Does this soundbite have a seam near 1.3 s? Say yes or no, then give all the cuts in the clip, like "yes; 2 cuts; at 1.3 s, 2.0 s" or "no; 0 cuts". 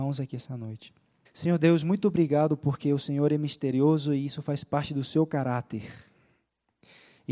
yes; 1 cut; at 1.3 s